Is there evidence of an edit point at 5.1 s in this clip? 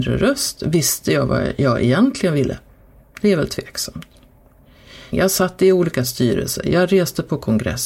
yes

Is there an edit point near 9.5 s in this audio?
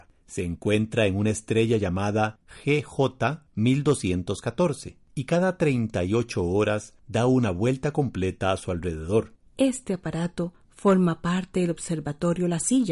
yes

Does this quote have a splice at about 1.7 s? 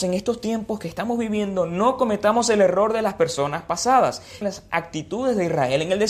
no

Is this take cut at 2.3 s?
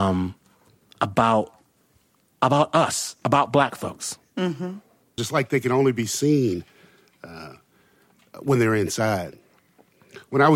no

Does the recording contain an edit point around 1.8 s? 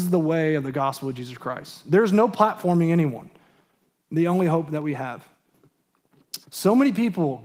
no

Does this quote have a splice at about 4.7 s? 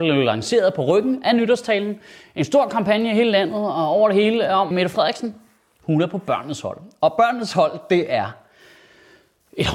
yes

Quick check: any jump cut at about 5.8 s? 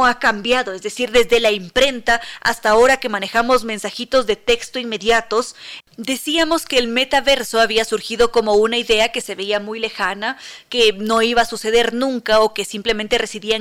yes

